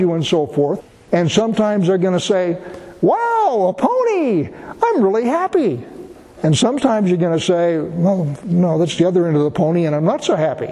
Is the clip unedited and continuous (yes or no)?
yes